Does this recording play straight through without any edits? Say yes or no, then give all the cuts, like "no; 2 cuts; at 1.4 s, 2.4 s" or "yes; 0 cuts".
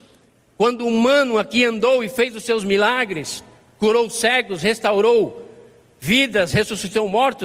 yes; 0 cuts